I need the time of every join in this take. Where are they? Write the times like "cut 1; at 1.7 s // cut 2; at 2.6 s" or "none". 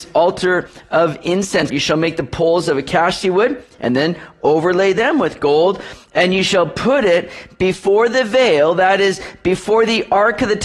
cut 1; at 1.7 s